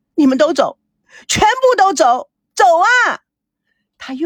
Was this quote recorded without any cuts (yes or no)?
no